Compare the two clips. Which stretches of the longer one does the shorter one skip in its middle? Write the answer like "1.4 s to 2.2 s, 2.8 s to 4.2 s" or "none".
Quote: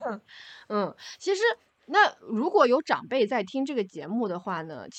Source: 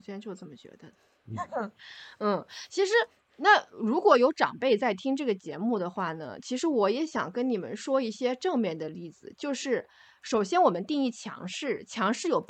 none